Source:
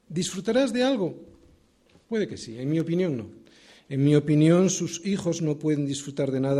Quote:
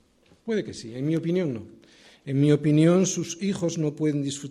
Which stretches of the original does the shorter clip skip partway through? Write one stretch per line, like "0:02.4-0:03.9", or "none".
none